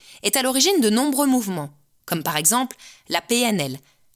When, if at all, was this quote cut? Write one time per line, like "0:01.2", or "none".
none